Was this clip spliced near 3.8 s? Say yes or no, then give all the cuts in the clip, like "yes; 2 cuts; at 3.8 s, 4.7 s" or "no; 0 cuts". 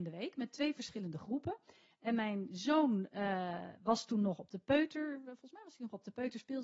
no; 0 cuts